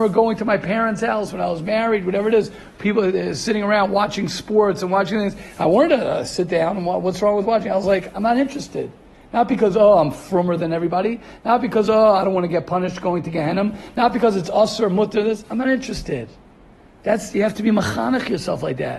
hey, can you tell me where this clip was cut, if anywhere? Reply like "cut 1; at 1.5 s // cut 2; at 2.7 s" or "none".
none